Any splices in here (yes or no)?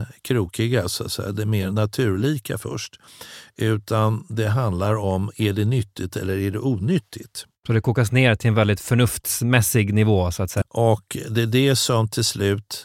yes